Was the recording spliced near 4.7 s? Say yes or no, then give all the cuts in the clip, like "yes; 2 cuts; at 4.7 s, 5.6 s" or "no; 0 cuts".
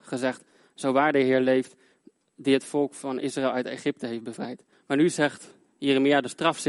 yes; 1 cut; at 4.7 s